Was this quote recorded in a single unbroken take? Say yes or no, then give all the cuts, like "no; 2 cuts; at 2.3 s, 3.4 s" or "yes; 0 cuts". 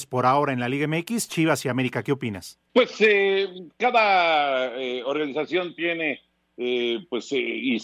yes; 0 cuts